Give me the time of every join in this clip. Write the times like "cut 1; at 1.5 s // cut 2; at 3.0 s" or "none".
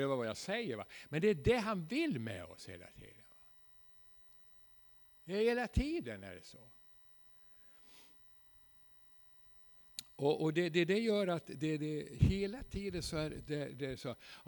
none

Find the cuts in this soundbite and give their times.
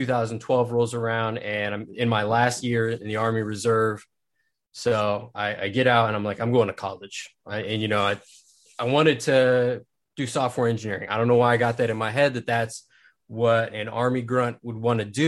none

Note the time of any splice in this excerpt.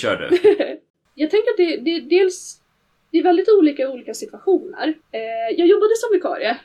cut 1; at 5.0 s

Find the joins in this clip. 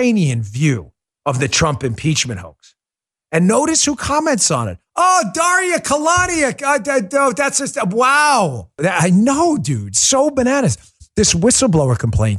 cut 1; at 8.8 s

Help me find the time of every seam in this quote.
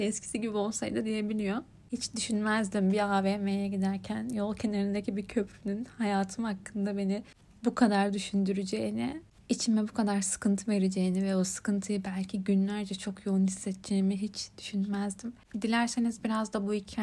none

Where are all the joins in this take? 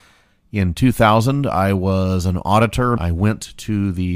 cut 1; at 3.0 s

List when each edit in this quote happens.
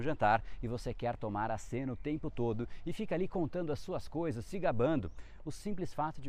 cut 1; at 5.4 s

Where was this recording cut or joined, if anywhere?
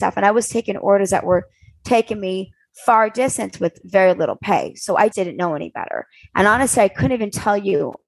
cut 1; at 5.1 s

